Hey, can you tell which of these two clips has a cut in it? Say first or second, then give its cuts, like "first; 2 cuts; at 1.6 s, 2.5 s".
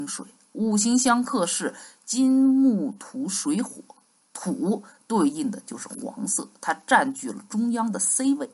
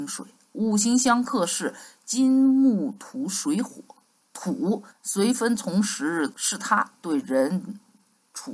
second; 2 cuts; at 4.9 s, 6.3 s